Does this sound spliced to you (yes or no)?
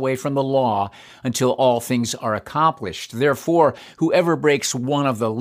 no